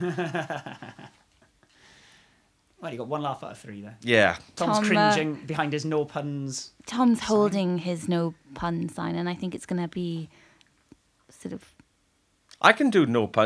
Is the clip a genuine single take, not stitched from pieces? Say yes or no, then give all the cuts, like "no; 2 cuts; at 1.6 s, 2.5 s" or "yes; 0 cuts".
yes; 0 cuts